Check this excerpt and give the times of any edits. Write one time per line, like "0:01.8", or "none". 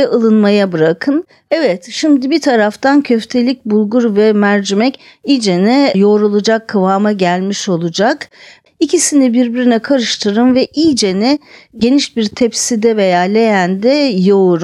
0:08.7